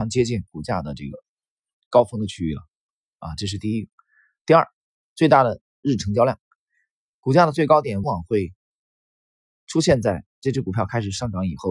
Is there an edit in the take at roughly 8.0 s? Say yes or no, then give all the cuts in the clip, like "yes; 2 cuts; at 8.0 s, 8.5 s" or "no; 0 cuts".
yes; 2 cuts; at 8.0 s, 10.3 s